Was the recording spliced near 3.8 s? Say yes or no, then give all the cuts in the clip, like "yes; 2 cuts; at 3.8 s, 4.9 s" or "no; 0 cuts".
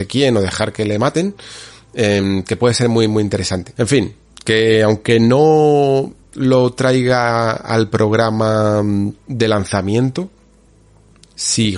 yes; 2 cuts; at 3.8 s, 9.2 s